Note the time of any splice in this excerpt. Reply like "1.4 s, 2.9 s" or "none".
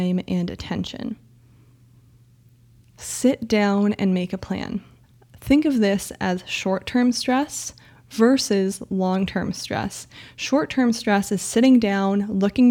none